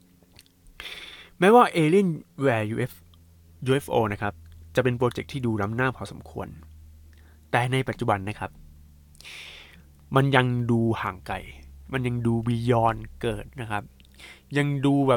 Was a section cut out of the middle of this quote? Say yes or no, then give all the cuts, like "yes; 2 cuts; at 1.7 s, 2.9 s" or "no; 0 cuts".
yes; 1 cut; at 13.5 s